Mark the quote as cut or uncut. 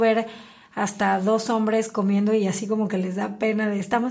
uncut